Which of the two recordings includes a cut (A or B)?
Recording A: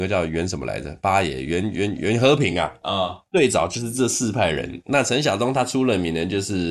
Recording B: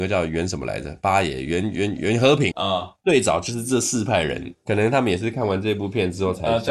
B